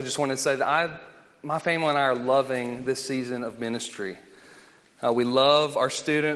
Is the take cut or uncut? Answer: uncut